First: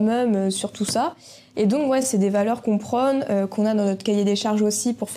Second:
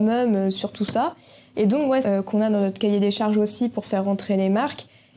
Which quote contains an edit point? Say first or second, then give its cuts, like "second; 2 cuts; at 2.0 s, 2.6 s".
second; 1 cut; at 2.0 s